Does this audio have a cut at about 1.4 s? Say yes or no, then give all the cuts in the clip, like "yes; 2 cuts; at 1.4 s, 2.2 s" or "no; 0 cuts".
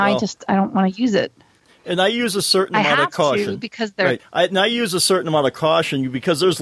no; 1 cut; at 4.2 s